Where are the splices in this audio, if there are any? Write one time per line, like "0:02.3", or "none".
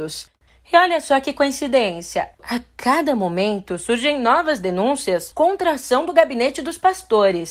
none